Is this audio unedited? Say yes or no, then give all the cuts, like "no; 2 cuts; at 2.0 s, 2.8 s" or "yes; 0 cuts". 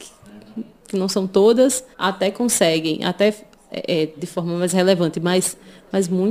no; 2 cuts; at 1.9 s, 4.2 s